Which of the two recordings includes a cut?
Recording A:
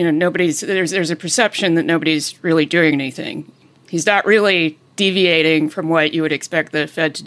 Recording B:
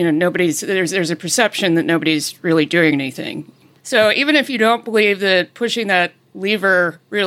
B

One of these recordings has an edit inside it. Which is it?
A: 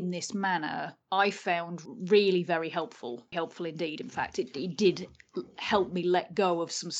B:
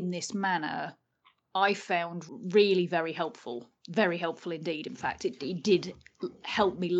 A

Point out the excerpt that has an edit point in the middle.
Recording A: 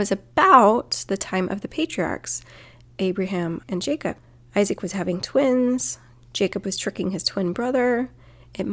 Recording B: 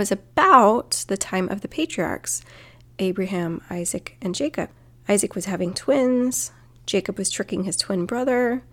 A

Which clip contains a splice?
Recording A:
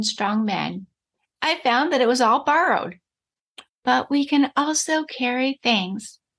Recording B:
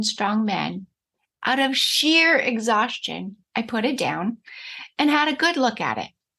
A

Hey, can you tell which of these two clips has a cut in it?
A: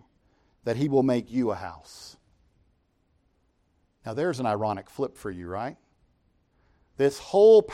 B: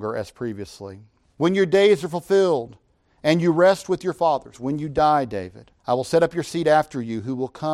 B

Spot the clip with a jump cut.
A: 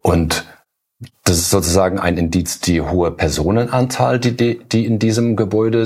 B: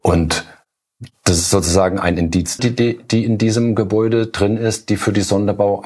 B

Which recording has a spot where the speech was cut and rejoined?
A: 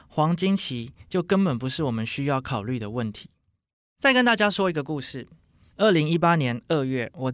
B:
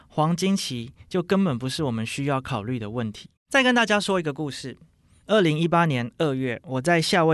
B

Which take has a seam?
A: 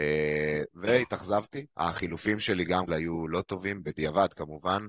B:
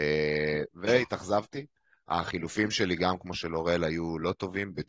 A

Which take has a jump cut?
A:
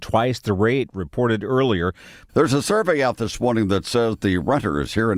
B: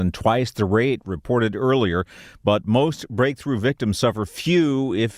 A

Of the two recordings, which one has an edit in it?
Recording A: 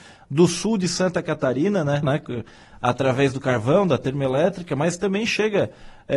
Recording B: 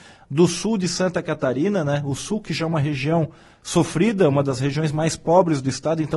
A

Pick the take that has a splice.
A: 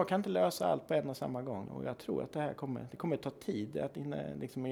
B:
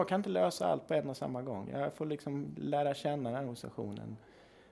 A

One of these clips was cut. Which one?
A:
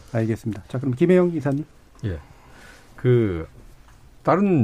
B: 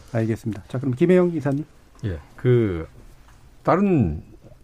B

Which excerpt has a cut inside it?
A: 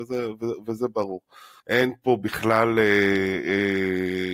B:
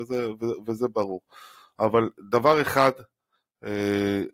A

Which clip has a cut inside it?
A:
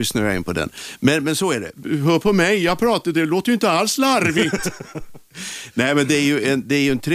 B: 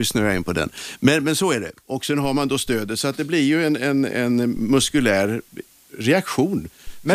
A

